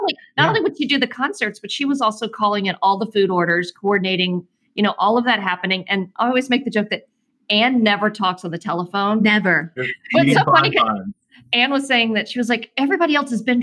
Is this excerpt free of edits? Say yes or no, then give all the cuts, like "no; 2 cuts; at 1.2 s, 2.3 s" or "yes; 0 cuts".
no; 1 cut; at 9.8 s